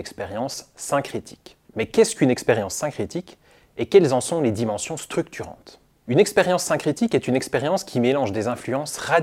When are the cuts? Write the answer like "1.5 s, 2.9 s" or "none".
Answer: none